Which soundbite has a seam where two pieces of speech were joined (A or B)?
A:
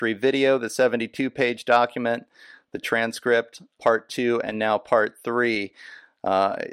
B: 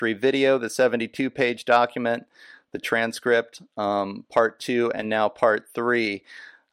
A